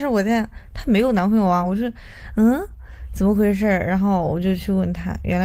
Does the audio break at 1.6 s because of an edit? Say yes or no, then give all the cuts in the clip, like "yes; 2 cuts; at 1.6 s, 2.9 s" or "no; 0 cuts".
no; 0 cuts